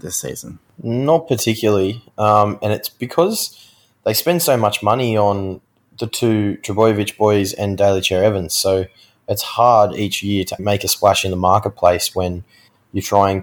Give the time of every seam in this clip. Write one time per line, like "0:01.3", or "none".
0:10.6